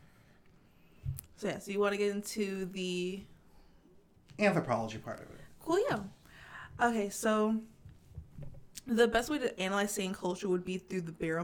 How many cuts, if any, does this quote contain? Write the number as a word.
zero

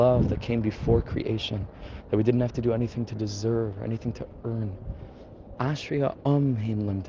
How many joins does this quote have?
one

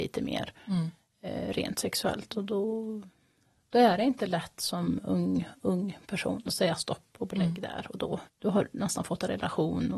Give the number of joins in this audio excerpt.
one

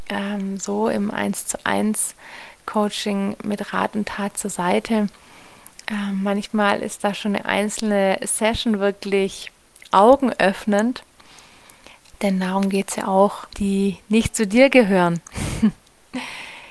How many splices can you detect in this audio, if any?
two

